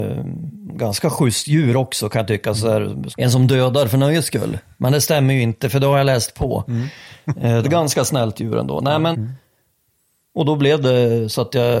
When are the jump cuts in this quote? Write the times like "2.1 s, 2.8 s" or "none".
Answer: 3.1 s, 7.6 s, 9.1 s